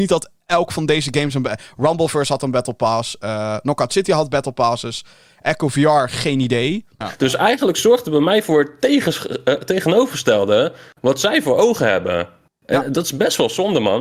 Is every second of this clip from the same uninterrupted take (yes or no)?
no